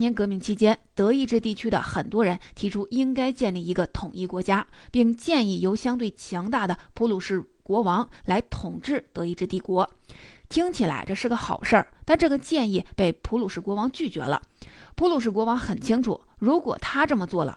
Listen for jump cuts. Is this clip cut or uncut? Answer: uncut